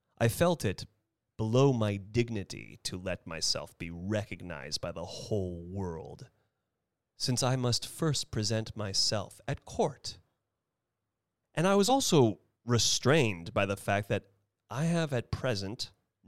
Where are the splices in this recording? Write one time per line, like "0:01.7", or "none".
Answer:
none